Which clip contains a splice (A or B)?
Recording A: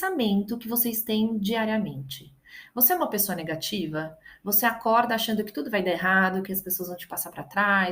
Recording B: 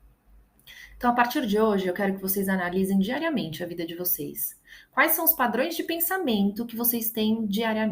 A